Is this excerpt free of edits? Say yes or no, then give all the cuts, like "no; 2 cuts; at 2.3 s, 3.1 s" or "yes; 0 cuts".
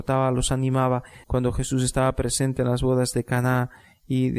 no; 1 cut; at 1.2 s